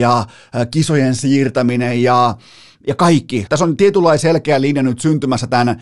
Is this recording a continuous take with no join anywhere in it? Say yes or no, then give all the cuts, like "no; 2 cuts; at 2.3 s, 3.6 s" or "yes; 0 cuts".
no; 1 cut; at 3.5 s